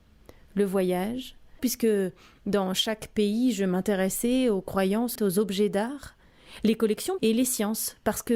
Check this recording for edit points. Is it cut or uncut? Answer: cut